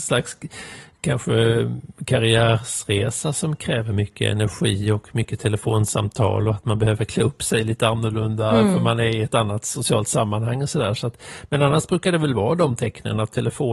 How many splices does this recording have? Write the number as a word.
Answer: zero